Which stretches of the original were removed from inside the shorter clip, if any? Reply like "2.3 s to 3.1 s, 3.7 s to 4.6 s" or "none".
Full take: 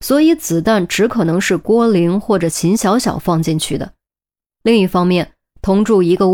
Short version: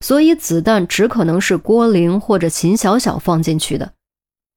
none